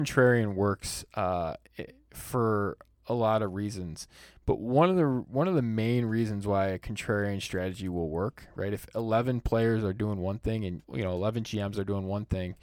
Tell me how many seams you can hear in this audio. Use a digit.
1